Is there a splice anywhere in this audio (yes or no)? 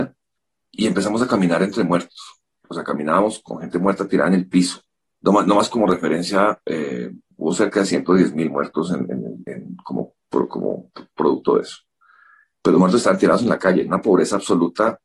no